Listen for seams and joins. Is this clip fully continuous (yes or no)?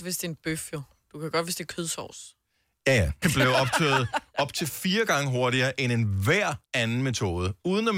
no